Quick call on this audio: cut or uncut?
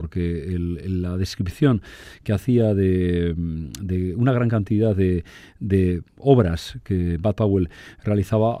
uncut